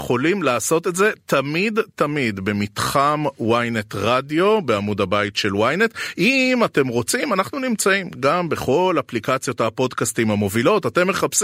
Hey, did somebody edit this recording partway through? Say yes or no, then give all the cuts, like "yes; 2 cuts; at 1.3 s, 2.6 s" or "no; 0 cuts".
no; 0 cuts